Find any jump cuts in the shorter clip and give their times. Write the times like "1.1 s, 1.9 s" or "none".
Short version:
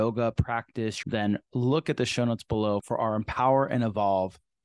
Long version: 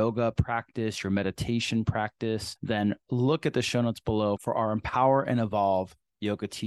1.0 s